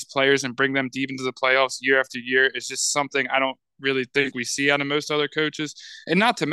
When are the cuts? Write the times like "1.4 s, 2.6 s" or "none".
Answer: none